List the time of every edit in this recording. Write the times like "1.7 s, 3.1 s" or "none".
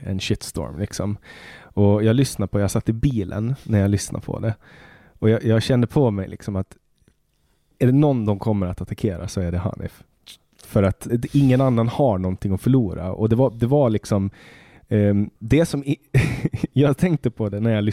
11.1 s, 15.4 s